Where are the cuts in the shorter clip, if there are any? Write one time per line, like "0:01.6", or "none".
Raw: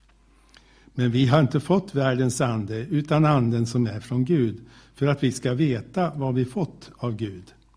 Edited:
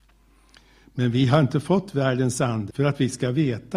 0:02.7